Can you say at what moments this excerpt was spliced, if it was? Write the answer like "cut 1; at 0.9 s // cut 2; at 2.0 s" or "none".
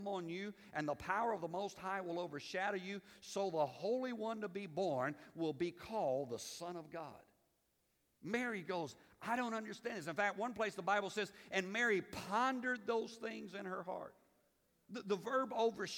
none